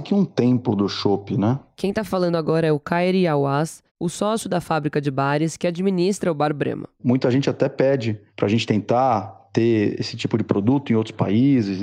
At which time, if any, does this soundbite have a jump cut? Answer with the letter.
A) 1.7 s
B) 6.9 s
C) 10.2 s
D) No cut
D